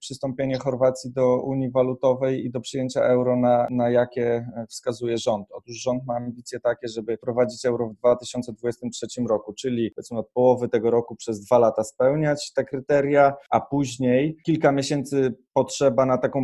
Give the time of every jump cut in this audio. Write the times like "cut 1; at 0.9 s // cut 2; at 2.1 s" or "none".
none